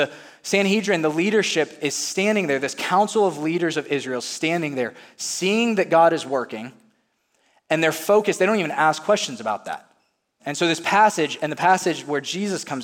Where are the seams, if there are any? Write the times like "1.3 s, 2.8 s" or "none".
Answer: 10.4 s